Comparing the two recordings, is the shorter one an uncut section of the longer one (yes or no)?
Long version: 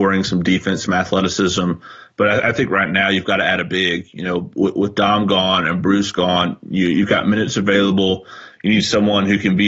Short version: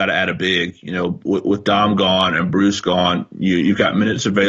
yes